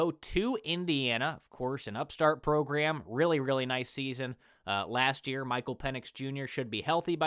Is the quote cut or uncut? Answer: uncut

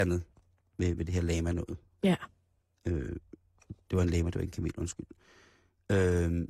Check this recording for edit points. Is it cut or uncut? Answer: uncut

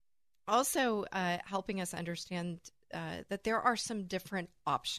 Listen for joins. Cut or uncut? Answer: uncut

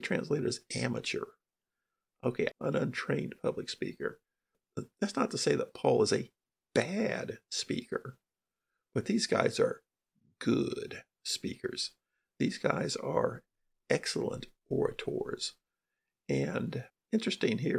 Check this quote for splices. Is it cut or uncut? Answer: cut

